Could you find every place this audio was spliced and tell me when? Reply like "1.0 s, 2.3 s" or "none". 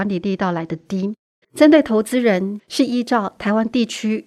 1.4 s, 2.6 s